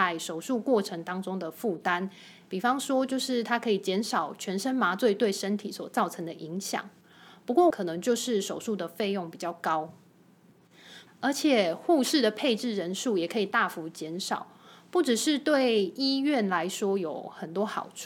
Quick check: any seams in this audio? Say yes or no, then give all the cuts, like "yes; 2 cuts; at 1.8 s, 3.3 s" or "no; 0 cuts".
yes; 2 cuts; at 7.7 s, 11.1 s